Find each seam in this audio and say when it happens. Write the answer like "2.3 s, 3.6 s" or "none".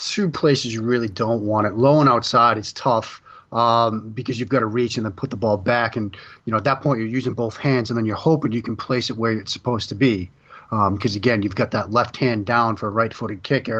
none